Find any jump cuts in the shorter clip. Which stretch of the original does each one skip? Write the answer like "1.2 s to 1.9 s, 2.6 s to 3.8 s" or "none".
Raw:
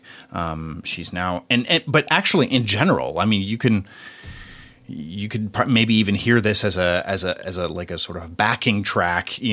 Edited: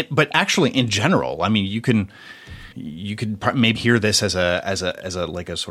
4.5 s to 4.8 s, 5.9 s to 6.2 s

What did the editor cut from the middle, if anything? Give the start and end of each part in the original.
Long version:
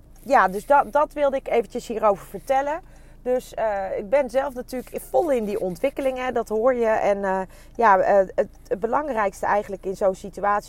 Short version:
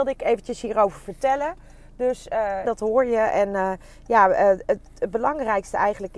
3.9 s to 6.3 s

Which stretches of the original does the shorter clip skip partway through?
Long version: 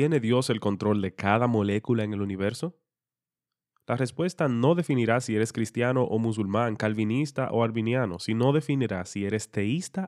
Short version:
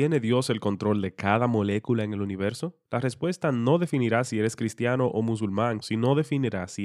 2.8 s to 3.8 s, 6.8 s to 8.2 s

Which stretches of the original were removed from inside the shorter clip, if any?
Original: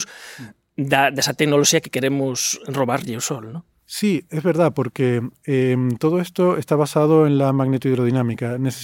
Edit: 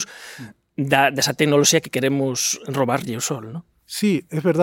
none

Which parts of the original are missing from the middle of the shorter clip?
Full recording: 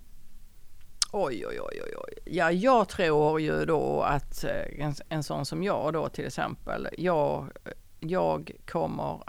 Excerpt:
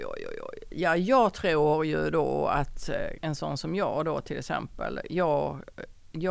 4.7 s to 5.0 s

